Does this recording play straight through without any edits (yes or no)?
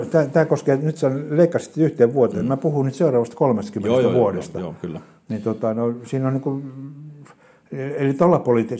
yes